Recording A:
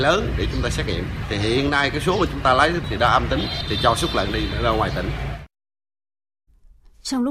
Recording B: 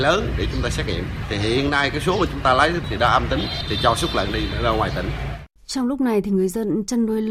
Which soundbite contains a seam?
B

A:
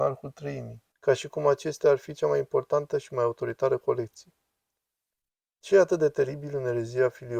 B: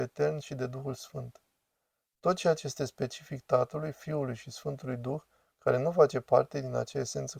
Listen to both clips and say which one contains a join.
A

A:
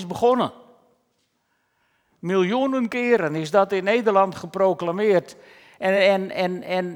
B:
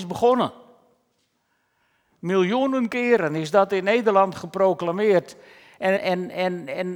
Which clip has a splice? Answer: B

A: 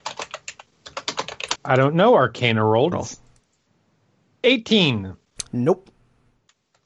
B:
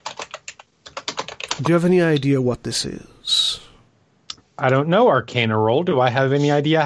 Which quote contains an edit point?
A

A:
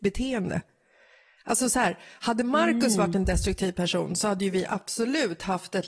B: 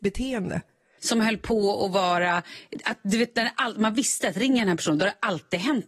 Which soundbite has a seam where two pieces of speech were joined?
B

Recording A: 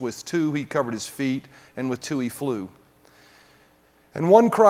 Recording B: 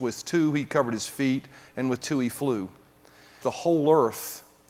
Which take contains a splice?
B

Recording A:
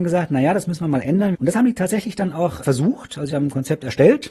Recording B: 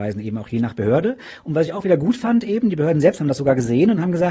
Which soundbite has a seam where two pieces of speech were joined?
A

